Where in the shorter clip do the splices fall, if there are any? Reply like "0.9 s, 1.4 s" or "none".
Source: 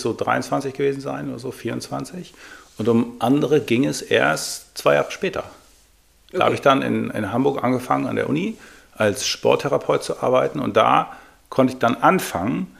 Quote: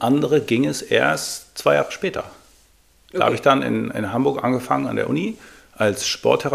none